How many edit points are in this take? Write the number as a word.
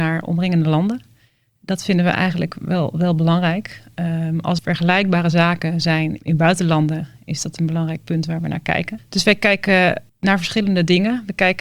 three